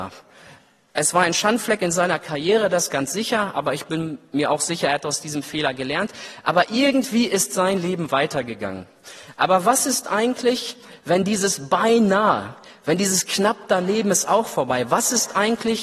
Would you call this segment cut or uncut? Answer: uncut